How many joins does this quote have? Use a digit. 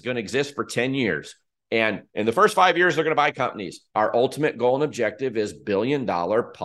1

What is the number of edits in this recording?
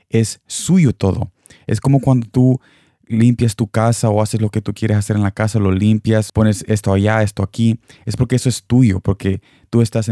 1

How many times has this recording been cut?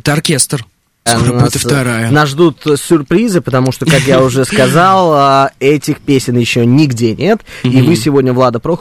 1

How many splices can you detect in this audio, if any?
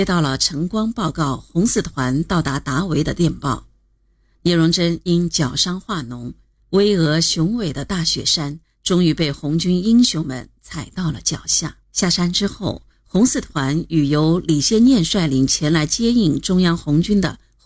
2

